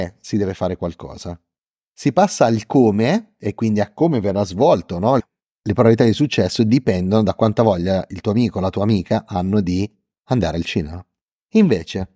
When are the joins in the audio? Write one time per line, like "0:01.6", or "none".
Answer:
0:05.2